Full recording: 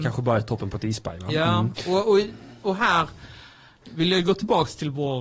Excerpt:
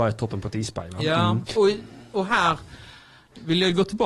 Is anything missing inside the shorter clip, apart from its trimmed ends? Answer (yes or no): yes